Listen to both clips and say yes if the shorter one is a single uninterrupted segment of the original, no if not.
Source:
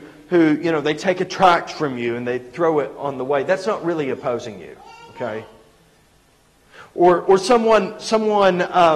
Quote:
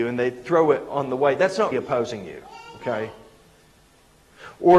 no